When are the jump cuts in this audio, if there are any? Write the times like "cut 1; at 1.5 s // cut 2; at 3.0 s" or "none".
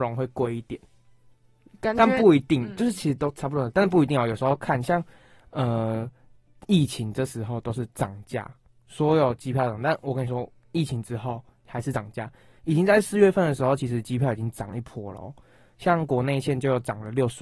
none